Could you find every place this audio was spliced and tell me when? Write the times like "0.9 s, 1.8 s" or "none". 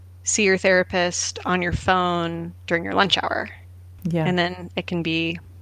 4.0 s